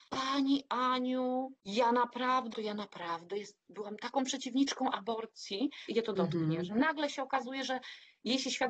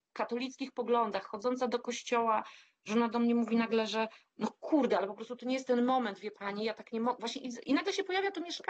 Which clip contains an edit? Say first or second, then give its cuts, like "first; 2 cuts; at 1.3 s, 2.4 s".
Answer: first; 2 cuts; at 2.5 s, 5.9 s